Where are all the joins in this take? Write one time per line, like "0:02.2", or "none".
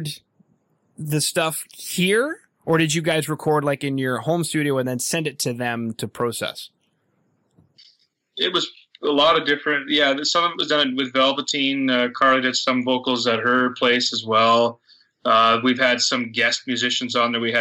none